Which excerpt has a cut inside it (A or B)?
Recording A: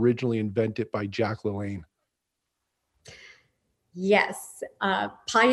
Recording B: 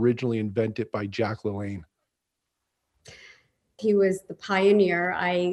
B